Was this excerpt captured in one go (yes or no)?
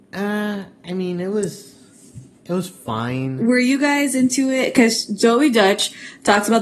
yes